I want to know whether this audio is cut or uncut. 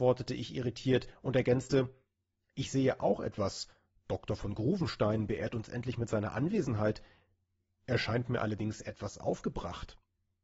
uncut